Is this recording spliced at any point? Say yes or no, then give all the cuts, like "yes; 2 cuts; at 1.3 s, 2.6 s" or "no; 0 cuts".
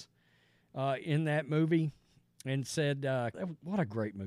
yes; 1 cut; at 3.3 s